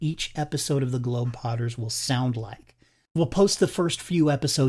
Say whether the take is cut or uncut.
uncut